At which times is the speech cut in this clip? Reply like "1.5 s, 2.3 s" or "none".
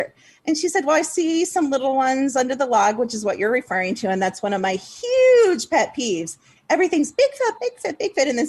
7.6 s